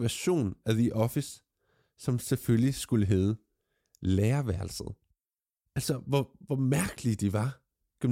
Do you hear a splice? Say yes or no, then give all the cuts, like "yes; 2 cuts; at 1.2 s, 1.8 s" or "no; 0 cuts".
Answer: yes; 1 cut; at 5.6 s